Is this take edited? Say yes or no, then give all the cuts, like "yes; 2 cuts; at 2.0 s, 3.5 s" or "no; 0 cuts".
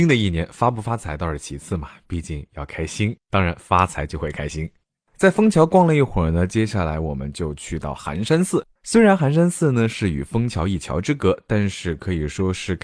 no; 0 cuts